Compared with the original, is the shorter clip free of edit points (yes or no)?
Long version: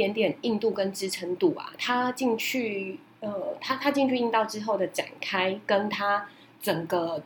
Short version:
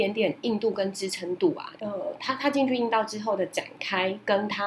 no